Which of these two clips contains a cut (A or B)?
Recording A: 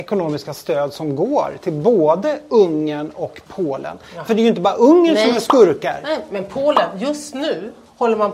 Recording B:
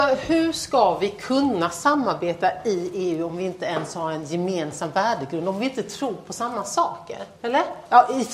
B